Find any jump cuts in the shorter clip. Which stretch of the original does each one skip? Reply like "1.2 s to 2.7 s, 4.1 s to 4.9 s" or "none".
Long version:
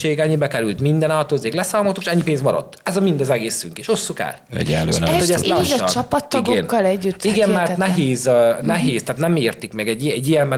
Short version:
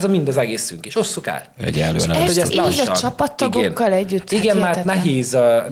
none